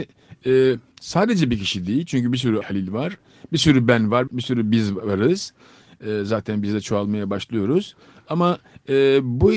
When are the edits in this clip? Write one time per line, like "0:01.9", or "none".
0:02.6
0:04.3